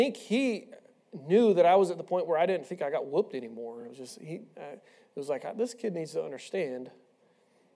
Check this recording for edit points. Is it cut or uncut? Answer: uncut